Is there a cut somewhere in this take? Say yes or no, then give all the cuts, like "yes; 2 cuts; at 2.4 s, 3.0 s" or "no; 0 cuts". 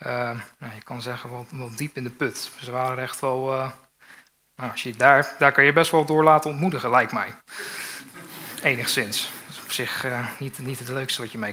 no; 0 cuts